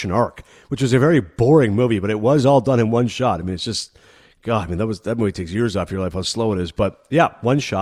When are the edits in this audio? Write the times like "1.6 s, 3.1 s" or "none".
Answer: none